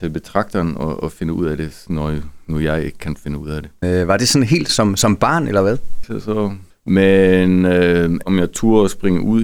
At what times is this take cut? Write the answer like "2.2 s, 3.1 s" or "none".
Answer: 3.8 s, 6.0 s, 8.2 s